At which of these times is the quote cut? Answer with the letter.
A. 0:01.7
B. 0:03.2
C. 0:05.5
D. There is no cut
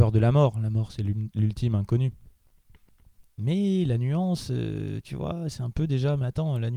B